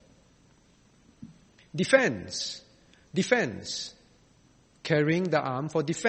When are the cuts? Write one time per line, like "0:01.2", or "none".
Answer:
0:01.6